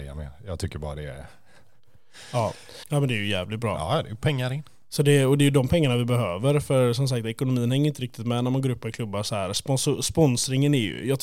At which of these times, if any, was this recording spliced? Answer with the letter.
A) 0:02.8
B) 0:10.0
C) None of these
A